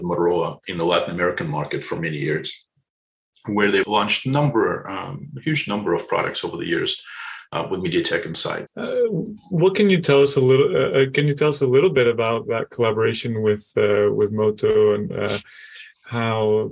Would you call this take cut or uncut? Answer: cut